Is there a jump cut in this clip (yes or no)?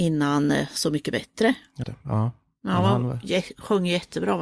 yes